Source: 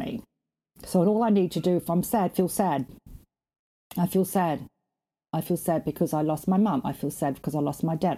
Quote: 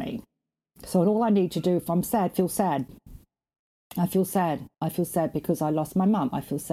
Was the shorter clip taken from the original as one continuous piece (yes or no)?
no